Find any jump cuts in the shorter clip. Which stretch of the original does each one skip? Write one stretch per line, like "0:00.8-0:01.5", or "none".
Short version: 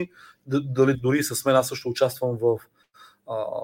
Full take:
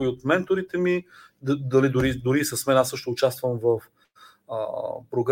0:01.9-0:02.2